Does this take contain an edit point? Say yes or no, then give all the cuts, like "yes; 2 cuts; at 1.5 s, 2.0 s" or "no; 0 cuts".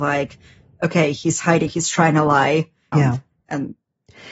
yes; 2 cuts; at 1.7 s, 2.9 s